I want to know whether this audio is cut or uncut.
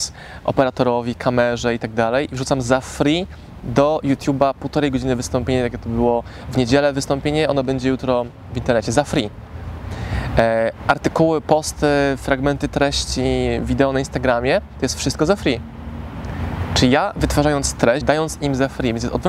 cut